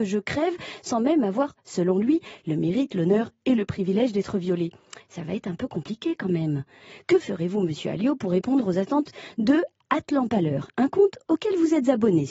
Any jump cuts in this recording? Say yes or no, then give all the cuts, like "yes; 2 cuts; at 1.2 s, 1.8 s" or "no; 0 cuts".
no; 0 cuts